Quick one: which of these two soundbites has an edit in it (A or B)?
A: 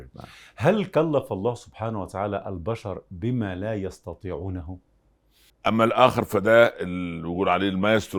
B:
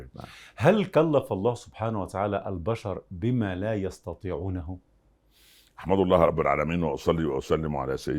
A